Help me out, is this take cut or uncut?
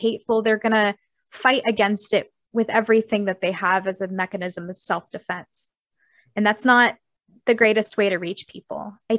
uncut